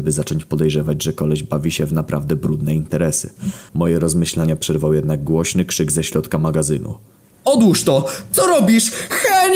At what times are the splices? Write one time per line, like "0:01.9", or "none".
0:03.7
0:07.3